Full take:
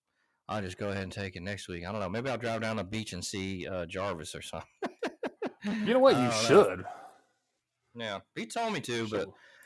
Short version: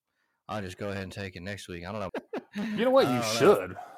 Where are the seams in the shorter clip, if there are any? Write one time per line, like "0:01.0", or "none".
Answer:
0:02.1